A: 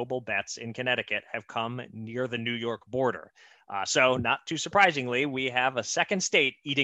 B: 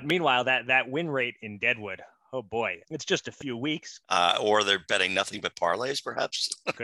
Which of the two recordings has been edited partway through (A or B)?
B